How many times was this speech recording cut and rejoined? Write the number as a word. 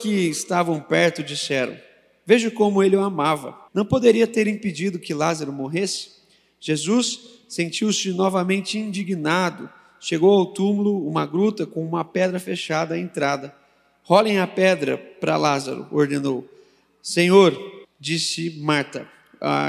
two